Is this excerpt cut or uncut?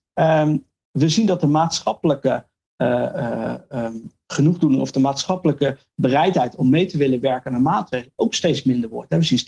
uncut